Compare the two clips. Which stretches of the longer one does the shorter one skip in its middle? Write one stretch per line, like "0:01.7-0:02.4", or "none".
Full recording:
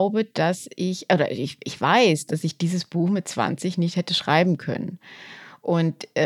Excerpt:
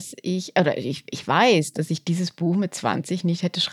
none

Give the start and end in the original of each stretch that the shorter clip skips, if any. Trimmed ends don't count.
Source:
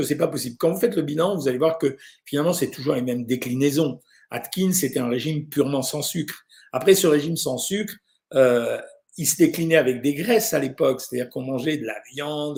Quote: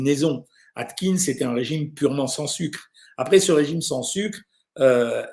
none

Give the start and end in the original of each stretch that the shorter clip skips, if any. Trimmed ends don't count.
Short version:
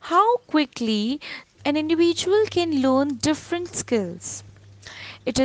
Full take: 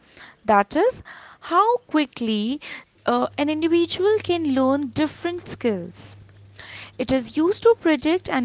0:03.0-0:03.3

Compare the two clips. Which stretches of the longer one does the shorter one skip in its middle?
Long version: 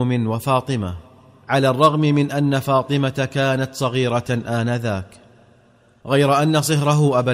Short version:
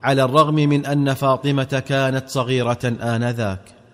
none

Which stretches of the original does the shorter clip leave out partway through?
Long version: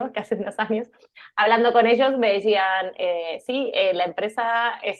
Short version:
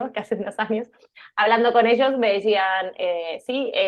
none

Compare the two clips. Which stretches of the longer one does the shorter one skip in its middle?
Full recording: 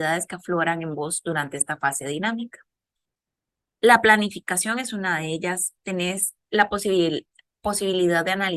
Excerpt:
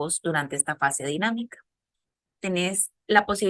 0:03.4-0:05.8

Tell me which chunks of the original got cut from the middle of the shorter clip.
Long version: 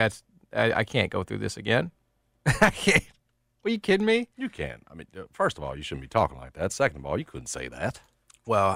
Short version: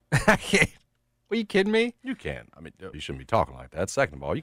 0:05.3-0:05.8

